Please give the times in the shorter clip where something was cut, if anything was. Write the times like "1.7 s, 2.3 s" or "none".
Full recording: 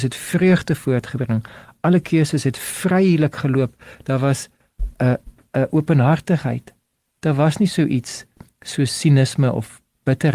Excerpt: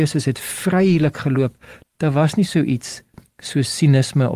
1.8 s